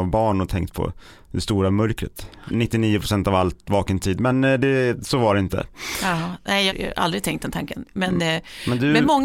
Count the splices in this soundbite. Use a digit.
0